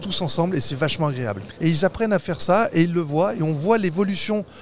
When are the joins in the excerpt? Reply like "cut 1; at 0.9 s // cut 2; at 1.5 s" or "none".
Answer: cut 1; at 1.6 s